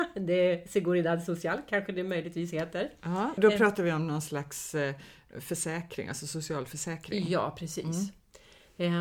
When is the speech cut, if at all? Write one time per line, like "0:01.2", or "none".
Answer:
0:03.4